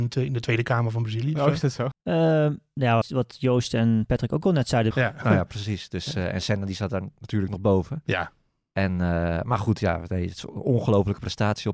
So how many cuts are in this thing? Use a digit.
3